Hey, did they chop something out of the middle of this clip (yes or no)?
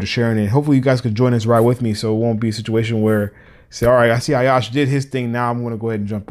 no